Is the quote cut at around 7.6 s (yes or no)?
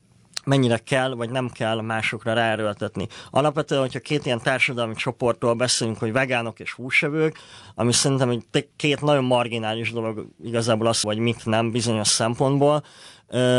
yes